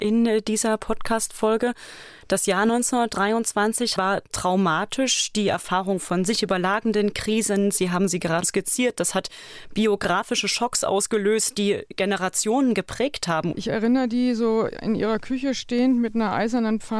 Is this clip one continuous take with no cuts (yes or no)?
no